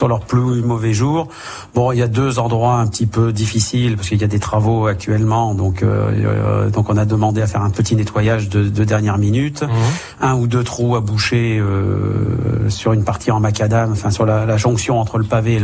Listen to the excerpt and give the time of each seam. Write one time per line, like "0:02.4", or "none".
none